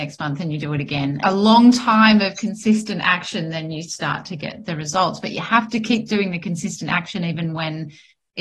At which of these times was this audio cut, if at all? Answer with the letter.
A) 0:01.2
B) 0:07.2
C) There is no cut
A